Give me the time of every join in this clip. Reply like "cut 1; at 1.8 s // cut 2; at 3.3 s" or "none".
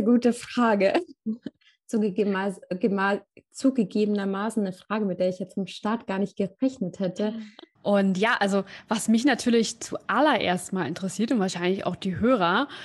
cut 1; at 7.8 s